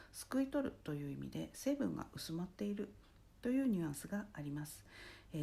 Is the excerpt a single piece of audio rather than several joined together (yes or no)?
yes